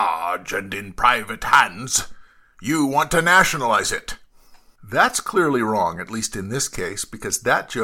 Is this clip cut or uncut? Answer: cut